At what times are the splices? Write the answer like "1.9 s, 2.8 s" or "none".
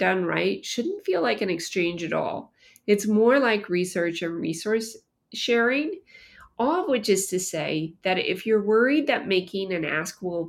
none